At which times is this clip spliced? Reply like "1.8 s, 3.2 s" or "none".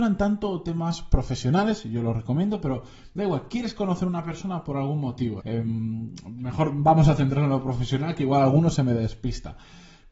5.4 s